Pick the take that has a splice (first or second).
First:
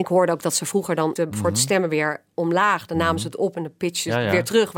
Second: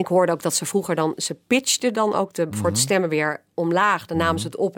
first